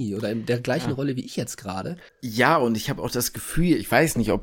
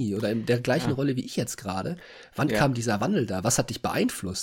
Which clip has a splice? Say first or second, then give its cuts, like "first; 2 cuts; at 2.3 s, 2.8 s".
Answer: first; 1 cut; at 2.1 s